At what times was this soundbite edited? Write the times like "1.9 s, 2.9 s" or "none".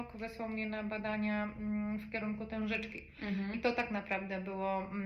none